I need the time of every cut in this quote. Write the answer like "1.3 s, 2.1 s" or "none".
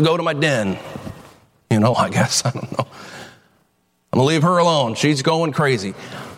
1.9 s